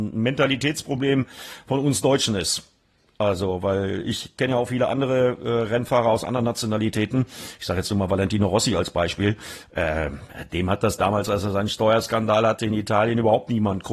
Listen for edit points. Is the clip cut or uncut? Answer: uncut